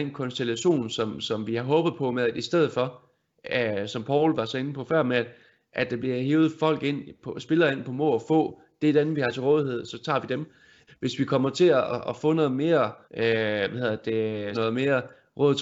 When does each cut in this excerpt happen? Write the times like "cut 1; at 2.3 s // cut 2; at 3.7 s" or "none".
cut 1; at 10.9 s // cut 2; at 13.0 s // cut 3; at 14.5 s

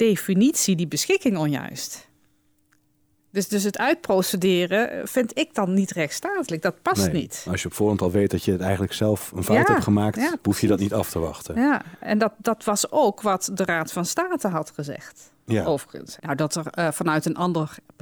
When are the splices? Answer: cut 1; at 16.2 s

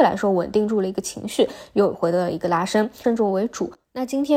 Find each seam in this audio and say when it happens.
cut 1; at 3.0 s

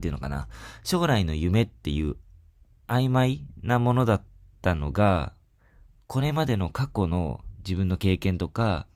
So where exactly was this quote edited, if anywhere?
cut 1; at 6.0 s

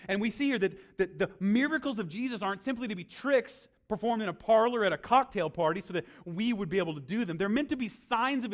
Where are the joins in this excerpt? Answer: none

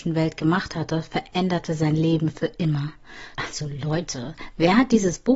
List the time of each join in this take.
cut 1; at 3.3 s

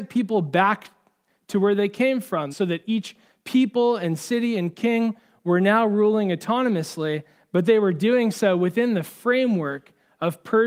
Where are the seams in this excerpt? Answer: cut 1; at 2.5 s

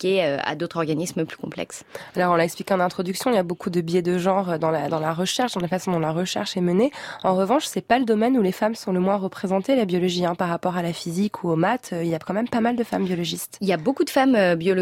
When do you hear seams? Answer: none

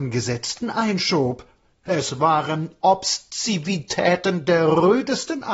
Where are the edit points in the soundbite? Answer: cut 1; at 1.9 s

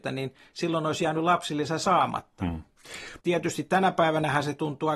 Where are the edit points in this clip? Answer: cut 1; at 3.2 s

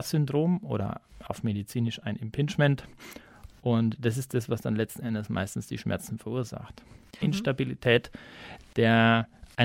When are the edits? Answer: cut 1; at 7.2 s

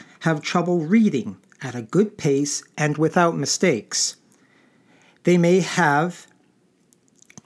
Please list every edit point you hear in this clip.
none

